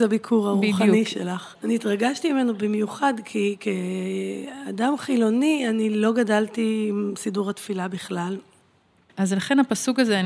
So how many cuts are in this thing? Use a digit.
2